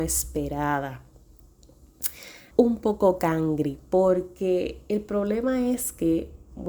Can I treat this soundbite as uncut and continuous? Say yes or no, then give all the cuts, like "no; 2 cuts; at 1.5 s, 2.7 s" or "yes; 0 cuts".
no; 1 cut; at 2.5 s